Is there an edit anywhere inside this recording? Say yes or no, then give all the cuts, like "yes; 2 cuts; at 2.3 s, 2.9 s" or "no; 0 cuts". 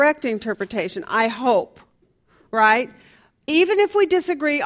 no; 0 cuts